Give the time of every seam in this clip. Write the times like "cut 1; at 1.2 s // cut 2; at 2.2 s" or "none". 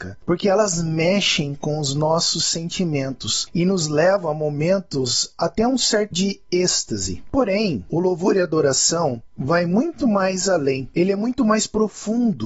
cut 1; at 6.1 s